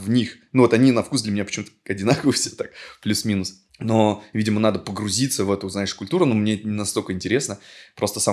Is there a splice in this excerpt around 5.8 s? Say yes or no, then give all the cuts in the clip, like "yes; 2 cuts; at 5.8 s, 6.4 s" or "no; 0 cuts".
no; 1 cut; at 3.7 s